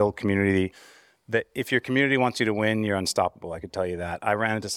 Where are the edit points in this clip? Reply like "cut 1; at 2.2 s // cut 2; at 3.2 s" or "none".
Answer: none